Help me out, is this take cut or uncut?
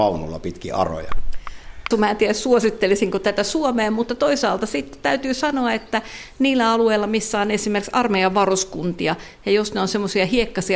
cut